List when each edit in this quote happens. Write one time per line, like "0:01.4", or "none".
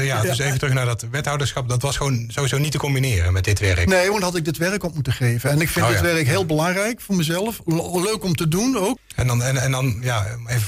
0:09.0